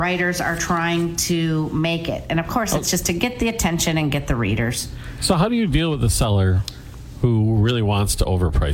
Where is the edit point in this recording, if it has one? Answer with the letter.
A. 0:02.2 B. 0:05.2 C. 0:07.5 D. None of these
D